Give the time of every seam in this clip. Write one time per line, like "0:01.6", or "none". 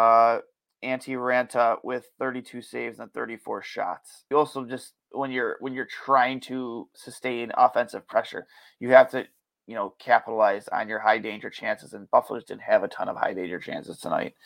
0:04.3
0:06.9